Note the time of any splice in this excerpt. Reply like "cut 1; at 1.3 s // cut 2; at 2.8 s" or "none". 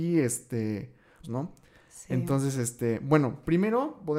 cut 1; at 1.2 s

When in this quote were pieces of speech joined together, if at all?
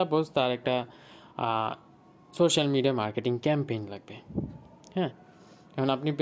none

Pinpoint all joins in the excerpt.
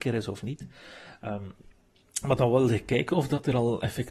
none

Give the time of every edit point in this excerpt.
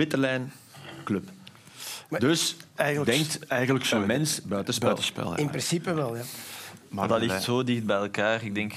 none

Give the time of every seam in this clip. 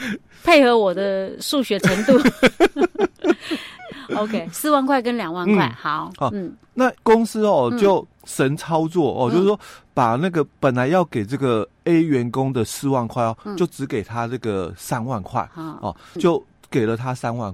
cut 1; at 7.0 s // cut 2; at 16.2 s

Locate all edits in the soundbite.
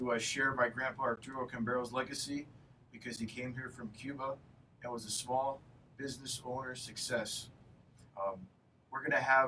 cut 1; at 8.1 s

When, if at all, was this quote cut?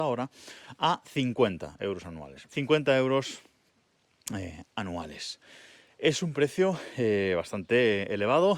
cut 1; at 2.5 s

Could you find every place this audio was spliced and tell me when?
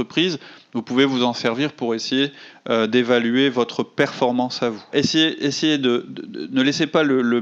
cut 1; at 4.9 s

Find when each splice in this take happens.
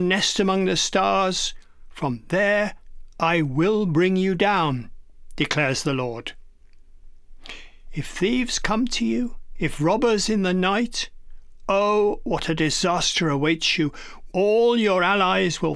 cut 1; at 14.3 s

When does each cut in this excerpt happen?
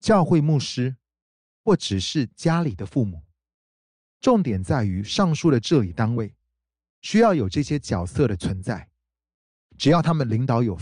none

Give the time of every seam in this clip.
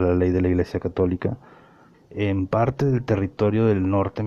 cut 1; at 1.9 s

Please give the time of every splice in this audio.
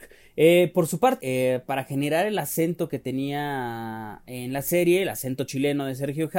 cut 1; at 1.2 s

